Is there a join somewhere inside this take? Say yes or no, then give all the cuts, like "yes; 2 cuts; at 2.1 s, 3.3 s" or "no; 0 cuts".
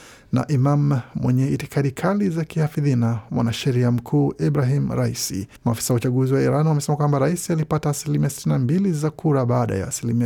yes; 1 cut; at 5.6 s